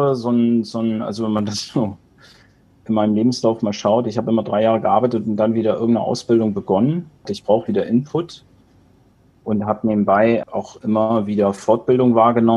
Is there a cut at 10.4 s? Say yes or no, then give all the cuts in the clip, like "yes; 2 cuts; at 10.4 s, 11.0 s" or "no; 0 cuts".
yes; 2 cuts; at 7.3 s, 10.4 s